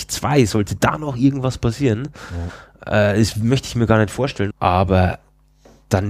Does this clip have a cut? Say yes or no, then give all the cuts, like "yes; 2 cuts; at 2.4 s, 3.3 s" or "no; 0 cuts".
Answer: yes; 1 cut; at 4.5 s